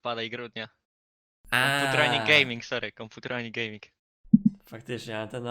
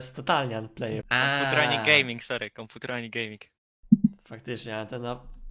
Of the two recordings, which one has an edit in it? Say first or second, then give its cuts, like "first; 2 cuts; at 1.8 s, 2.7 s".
second; 1 cut; at 1.0 s